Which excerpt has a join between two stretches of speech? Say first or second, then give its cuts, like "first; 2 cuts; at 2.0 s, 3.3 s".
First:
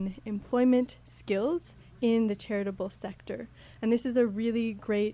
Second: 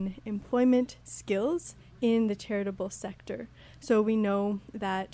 first; 1 cut; at 3.8 s